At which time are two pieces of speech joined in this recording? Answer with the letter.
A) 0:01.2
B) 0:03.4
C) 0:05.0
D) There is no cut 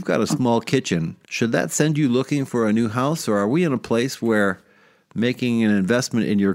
A